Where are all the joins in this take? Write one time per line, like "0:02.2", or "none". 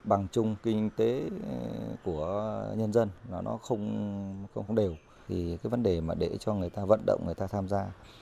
0:04.7